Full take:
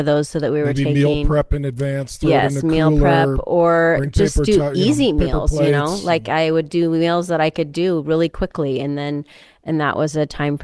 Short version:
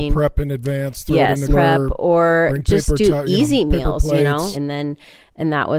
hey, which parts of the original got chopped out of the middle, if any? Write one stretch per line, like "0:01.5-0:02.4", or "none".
0:02.6-0:03.0
0:06.0-0:08.8